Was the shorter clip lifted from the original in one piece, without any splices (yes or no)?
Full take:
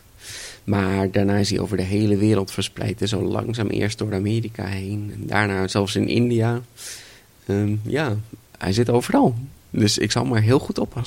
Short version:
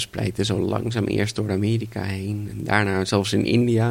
yes